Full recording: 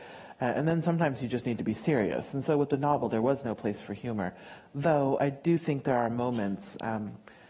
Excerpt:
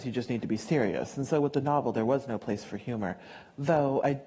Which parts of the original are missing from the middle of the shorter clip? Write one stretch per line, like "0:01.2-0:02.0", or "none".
none